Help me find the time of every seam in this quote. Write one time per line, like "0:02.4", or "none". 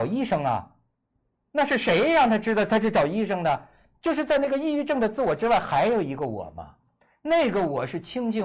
none

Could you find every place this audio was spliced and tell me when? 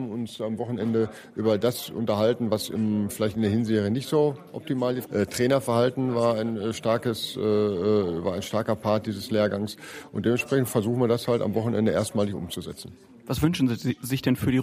0:05.1

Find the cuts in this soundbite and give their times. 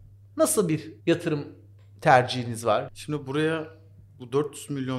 0:01.0
0:02.9

